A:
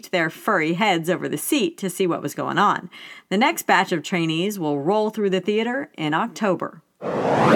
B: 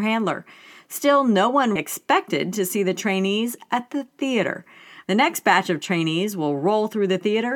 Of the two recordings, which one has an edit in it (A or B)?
B